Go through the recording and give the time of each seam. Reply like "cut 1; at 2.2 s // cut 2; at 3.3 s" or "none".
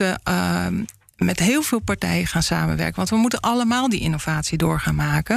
none